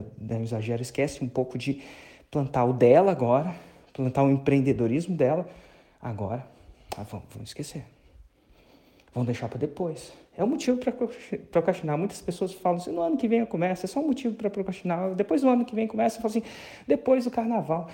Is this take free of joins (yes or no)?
yes